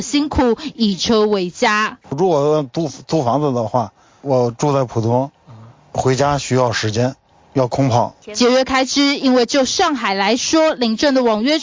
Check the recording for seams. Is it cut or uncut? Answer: cut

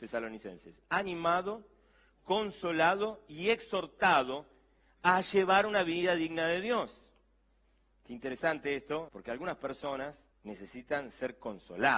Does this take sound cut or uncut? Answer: cut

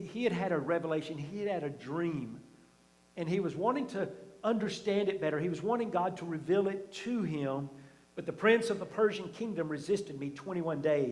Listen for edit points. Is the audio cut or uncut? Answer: cut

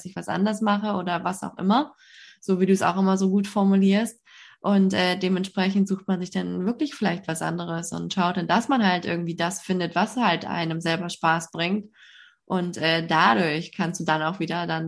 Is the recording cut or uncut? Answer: uncut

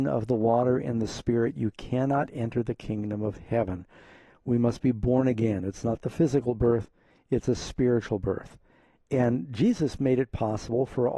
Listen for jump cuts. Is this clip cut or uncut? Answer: uncut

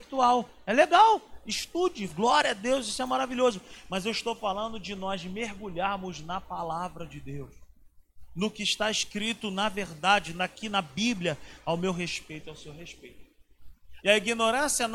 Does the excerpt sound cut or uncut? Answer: cut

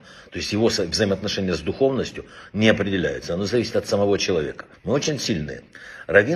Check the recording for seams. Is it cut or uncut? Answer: cut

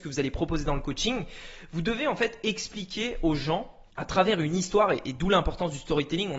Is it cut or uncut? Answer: cut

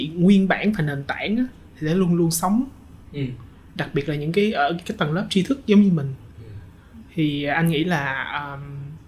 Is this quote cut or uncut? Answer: uncut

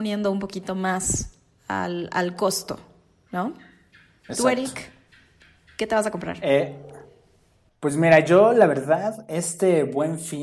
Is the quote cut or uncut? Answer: uncut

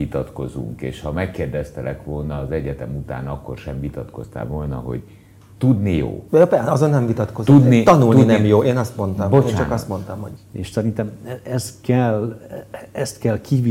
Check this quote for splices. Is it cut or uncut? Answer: cut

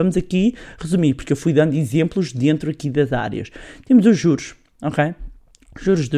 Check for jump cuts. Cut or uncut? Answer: uncut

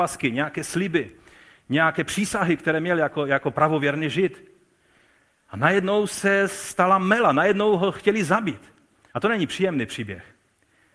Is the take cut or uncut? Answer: uncut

